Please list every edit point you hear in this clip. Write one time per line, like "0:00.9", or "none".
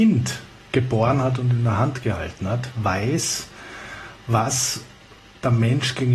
none